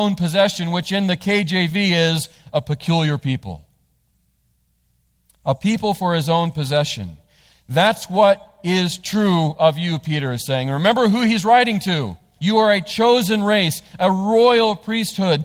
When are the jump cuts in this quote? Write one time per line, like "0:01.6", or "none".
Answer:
0:12.4